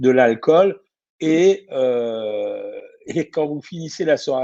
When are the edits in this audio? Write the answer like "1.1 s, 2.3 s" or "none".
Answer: none